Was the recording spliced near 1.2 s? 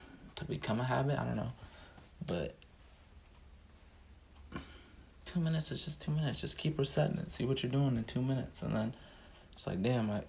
no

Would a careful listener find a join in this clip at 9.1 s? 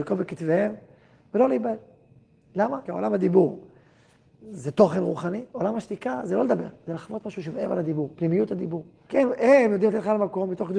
yes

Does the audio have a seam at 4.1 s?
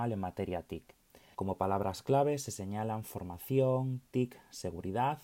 no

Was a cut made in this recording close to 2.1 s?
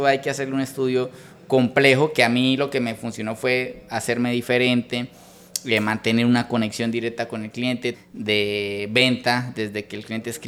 no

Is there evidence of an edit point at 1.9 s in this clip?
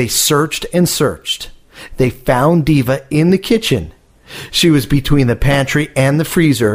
yes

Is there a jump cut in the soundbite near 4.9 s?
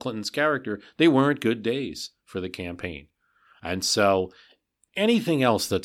yes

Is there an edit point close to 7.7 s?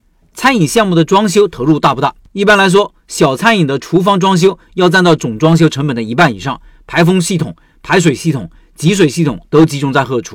no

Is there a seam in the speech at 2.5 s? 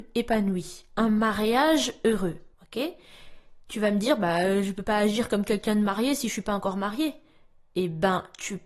yes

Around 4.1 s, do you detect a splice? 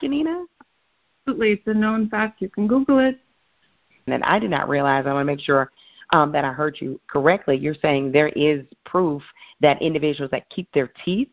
yes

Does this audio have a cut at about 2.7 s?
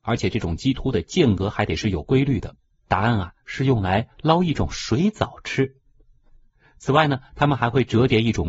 yes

